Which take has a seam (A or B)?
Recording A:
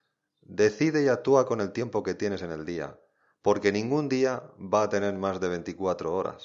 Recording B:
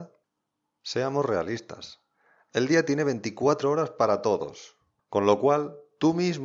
B